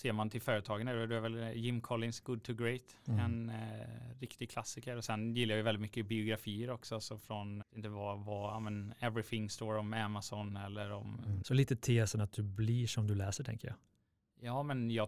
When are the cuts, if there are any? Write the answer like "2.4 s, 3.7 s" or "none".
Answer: 7.6 s, 11.4 s